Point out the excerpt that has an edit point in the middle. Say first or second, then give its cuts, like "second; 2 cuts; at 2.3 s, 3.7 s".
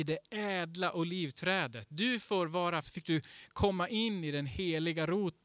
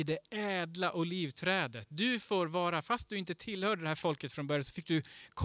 first; 1 cut; at 2.8 s